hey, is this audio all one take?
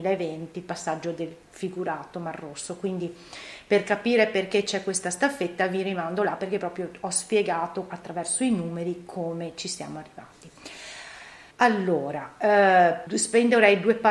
no; 2 cuts; at 11.5 s, 13.1 s

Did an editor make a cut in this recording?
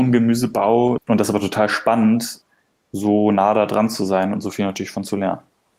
yes; 1 cut; at 1.0 s

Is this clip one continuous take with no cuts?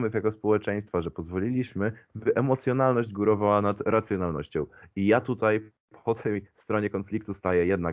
yes; 0 cuts

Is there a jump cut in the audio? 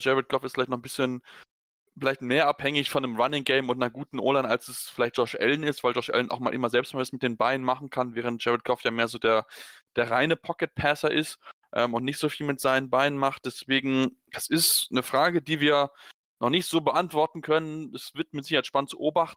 no; 0 cuts

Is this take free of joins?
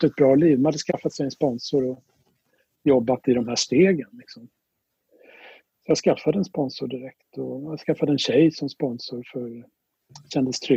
yes; 0 cuts

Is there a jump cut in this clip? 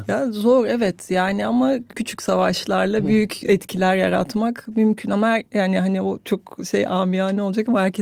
yes; 1 cut; at 1.9 s

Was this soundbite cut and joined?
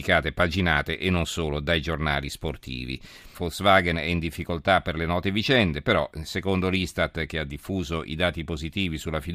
yes; 1 cut; at 3.3 s

